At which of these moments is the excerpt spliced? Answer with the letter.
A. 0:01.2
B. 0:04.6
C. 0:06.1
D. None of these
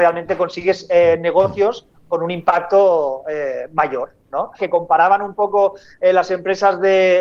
B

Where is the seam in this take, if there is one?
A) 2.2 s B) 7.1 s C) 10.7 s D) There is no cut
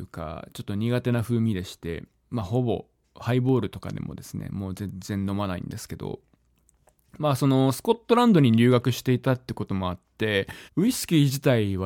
C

